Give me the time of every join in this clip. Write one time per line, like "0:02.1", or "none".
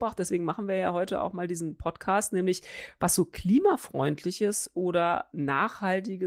none

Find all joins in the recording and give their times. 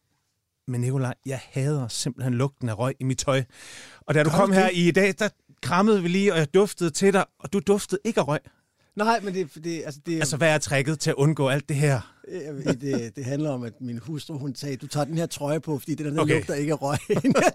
0:12.6

